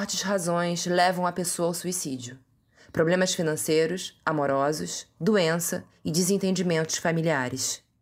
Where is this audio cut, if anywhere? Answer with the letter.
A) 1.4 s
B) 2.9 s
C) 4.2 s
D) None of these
D